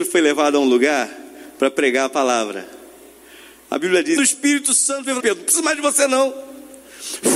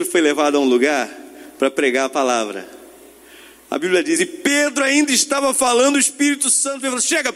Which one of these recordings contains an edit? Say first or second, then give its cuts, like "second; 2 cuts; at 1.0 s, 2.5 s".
first; 2 cuts; at 4.2 s, 5.2 s